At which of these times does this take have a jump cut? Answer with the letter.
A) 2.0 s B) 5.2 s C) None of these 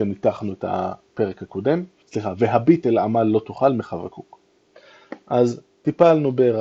A